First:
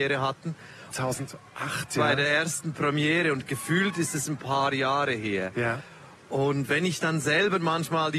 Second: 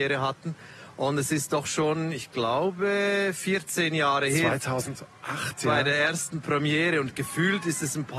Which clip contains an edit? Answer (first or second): first